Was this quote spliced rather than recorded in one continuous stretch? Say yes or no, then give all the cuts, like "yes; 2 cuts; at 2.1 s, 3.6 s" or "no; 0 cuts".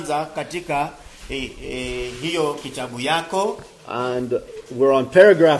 no; 0 cuts